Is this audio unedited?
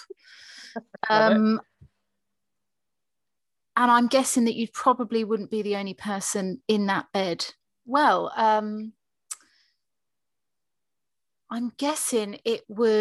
no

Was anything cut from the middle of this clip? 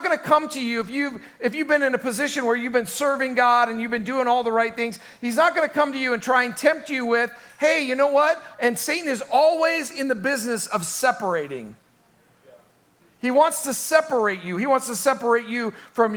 yes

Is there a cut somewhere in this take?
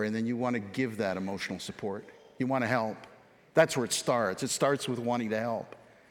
no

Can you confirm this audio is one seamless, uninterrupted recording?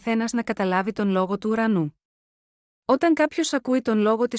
yes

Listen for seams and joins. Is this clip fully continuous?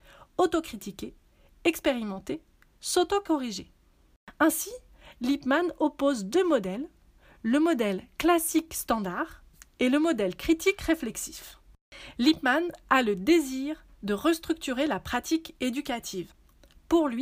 yes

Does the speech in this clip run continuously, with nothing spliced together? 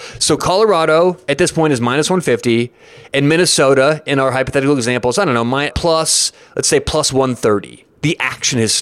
no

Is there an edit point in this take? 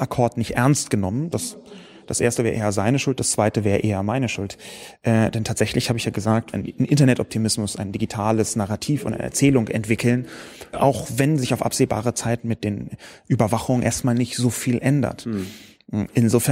yes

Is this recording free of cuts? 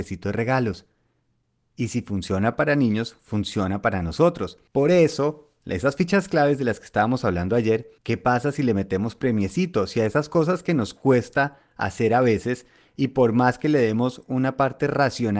no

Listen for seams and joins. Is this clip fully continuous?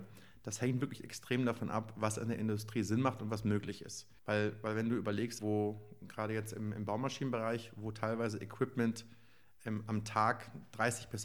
no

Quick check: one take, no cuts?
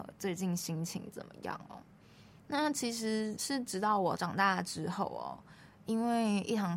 no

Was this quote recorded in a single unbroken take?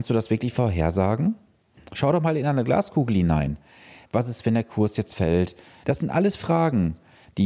no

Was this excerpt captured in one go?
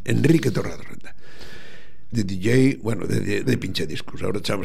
no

